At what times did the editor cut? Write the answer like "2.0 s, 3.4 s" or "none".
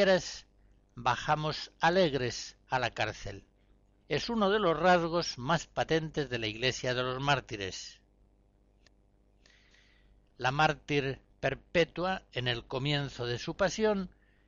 4.0 s